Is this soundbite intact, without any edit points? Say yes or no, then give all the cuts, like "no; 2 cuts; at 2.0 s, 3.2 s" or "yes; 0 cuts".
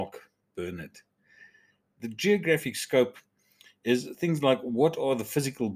yes; 0 cuts